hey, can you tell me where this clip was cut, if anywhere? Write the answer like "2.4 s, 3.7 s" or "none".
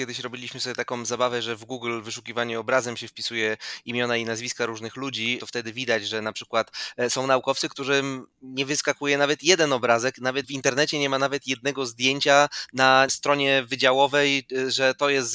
none